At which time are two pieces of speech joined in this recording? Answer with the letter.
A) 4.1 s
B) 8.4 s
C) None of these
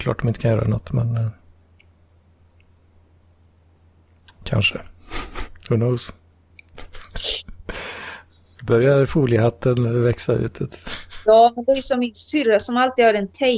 C